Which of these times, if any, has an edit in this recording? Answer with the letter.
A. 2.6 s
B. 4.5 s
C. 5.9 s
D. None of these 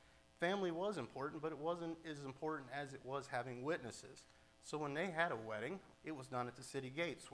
C